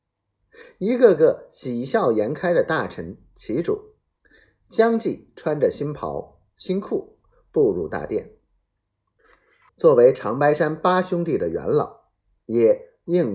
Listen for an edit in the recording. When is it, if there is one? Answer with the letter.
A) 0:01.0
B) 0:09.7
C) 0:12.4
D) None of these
B